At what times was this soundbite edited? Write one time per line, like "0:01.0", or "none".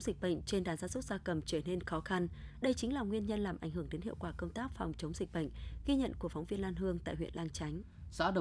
none